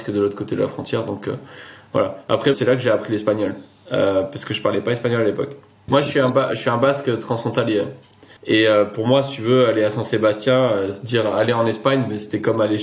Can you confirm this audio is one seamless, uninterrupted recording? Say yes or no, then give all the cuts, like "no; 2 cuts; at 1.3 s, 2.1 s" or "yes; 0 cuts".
no; 3 cuts; at 2.5 s, 5.9 s, 8.4 s